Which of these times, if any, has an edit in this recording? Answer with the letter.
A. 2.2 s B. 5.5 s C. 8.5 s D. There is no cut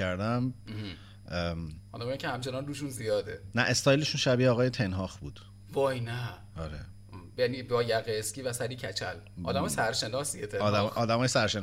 D